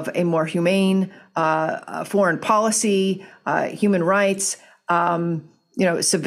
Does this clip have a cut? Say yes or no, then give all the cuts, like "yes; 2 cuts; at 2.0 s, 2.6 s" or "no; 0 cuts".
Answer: no; 0 cuts